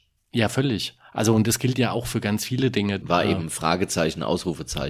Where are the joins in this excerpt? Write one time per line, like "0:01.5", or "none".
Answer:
0:03.0